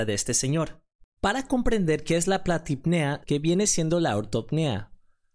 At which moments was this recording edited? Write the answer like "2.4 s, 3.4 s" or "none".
1.2 s, 3.2 s